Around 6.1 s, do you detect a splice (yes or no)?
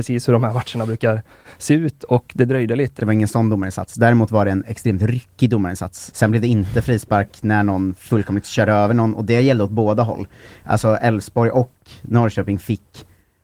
yes